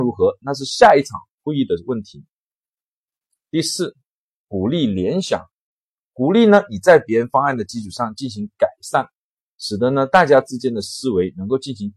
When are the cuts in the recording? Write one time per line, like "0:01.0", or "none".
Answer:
none